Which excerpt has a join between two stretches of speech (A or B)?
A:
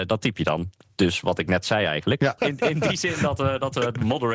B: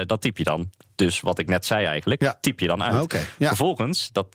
A